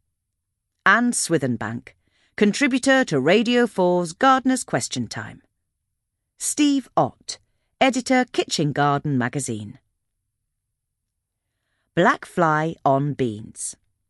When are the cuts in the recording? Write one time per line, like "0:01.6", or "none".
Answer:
none